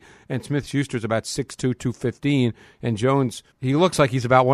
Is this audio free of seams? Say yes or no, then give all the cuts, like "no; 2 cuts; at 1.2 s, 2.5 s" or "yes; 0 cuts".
no; 1 cut; at 3.5 s